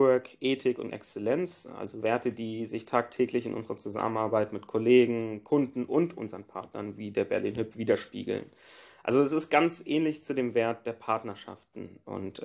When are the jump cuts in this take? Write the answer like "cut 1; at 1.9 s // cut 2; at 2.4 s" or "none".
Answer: none